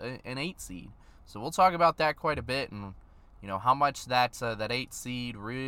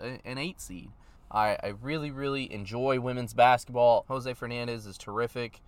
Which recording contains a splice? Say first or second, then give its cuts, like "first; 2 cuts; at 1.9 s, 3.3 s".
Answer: second; 2 cuts; at 1.2 s, 4.1 s